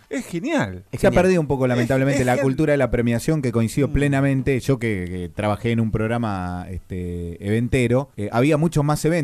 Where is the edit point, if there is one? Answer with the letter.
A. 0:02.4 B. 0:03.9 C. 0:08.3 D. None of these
A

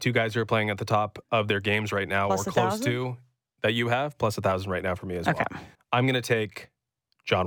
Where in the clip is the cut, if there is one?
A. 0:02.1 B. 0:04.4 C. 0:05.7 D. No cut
C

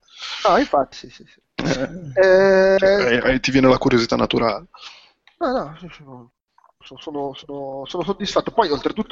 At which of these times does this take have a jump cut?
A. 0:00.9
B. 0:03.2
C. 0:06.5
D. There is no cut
A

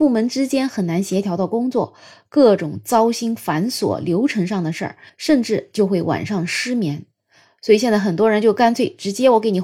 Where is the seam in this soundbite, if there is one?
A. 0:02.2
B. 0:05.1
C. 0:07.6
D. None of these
B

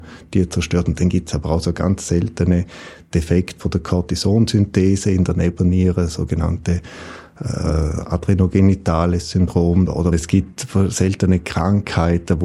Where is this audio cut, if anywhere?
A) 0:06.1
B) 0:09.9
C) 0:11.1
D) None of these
B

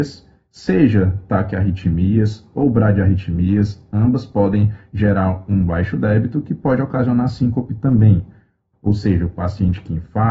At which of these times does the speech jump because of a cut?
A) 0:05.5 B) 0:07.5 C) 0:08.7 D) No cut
C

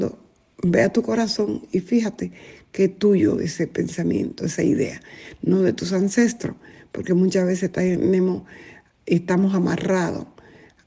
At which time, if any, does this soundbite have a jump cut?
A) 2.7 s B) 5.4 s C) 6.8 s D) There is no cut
D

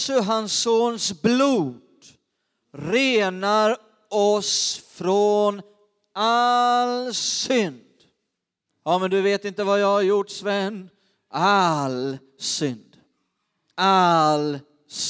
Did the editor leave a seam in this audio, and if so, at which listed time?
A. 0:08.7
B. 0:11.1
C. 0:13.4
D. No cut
A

